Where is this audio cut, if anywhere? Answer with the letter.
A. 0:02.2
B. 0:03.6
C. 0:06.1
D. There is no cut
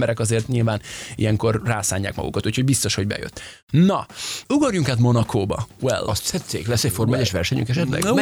B